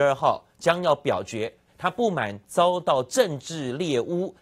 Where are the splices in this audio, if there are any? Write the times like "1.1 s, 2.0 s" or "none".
1.7 s